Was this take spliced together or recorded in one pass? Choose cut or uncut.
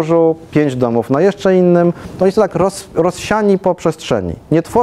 uncut